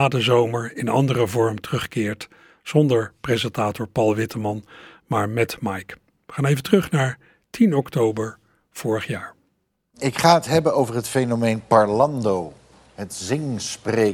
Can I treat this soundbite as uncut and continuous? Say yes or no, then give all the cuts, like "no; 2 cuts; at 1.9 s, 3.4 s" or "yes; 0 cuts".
yes; 0 cuts